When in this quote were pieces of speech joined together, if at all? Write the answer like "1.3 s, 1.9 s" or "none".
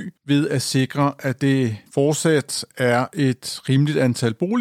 1.9 s

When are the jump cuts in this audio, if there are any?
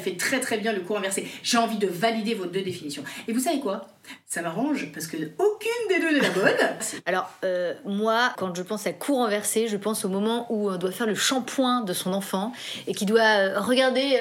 6.8 s, 8.4 s

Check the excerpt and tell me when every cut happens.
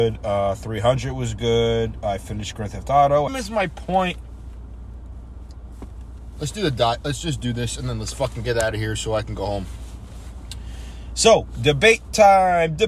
3.3 s

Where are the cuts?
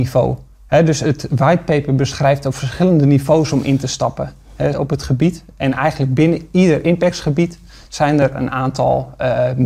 4.7 s

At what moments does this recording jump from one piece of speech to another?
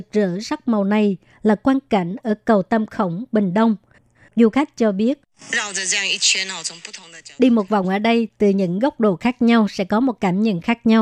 4.1 s

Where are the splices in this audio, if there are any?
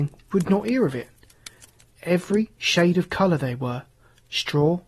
1.9 s

